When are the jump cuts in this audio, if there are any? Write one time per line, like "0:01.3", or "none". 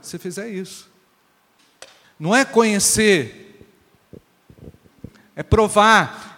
0:02.0